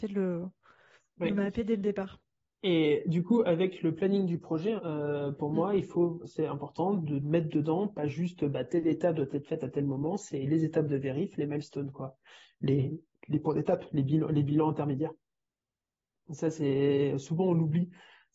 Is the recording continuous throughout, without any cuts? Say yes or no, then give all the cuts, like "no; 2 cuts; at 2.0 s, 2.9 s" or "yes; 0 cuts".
no; 1 cut; at 4.8 s